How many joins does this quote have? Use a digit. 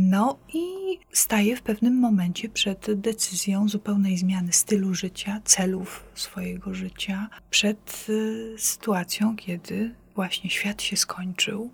0